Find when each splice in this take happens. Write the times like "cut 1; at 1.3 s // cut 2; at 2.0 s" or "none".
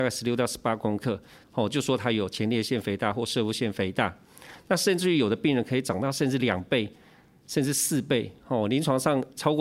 cut 1; at 1.4 s